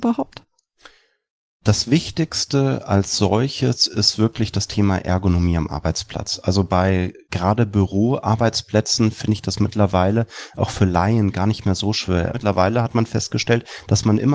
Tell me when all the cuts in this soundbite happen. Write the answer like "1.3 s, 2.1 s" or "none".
12.3 s